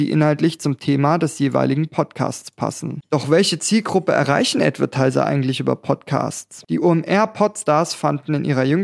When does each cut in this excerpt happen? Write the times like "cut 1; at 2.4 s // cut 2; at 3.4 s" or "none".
none